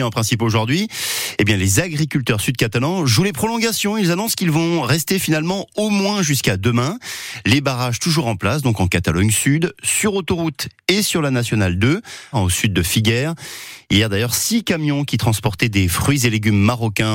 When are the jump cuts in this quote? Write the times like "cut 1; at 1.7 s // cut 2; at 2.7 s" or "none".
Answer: cut 1; at 12.3 s